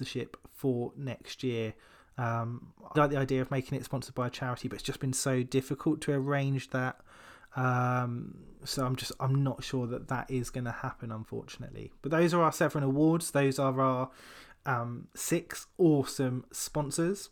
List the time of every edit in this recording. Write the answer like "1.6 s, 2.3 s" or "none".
2.9 s

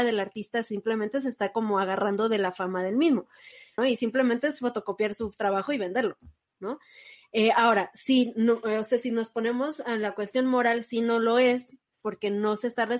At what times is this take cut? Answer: 3.8 s

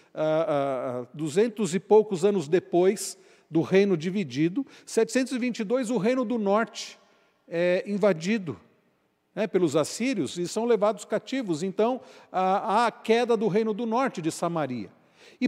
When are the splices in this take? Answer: none

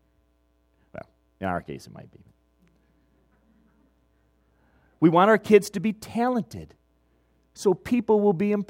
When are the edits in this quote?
none

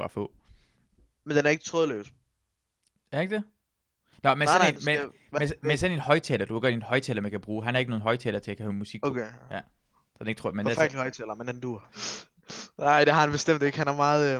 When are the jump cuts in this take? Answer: 11.9 s

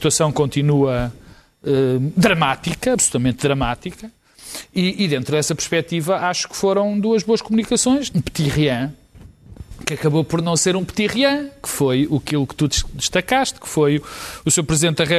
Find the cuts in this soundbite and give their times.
8.1 s

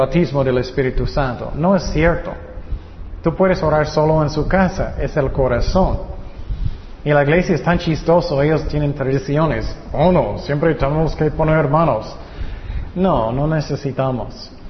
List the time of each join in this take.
none

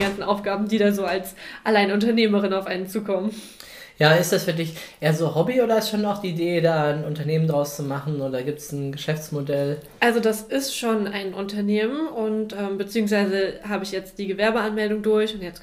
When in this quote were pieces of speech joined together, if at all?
none

